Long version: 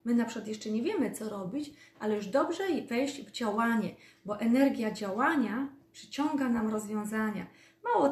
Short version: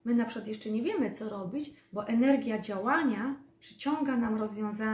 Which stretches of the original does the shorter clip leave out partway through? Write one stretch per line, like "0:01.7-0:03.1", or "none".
0:01.8-0:04.1

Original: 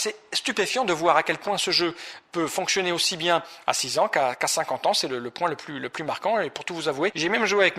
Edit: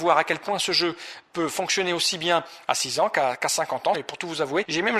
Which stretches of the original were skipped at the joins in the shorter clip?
0:04.9-0:06.4

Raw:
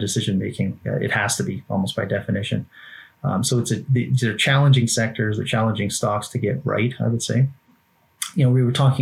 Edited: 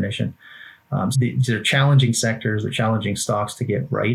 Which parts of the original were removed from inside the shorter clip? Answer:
0:03.4-0:03.9

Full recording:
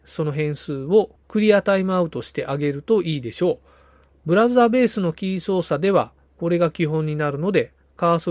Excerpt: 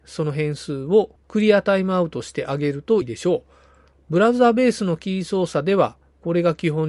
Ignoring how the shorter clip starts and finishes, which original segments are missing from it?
0:03.0-0:03.2

